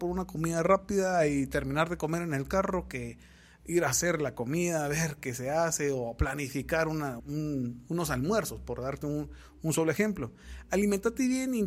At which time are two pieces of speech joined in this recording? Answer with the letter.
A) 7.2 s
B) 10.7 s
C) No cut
A